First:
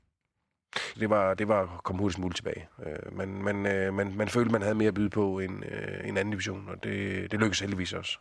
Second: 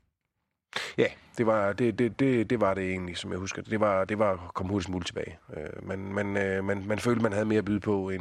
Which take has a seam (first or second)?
first